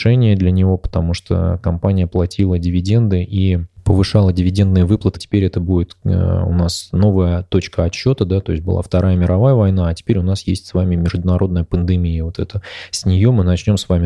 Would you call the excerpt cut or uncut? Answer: cut